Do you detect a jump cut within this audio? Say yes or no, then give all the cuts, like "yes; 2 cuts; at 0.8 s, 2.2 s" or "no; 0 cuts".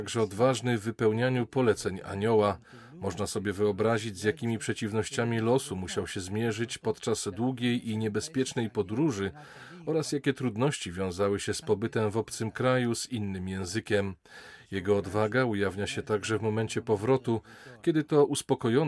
no; 0 cuts